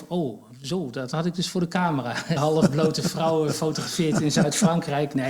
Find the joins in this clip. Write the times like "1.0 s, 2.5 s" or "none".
2.4 s